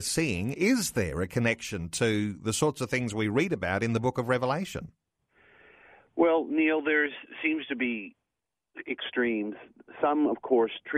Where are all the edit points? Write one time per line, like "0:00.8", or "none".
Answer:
none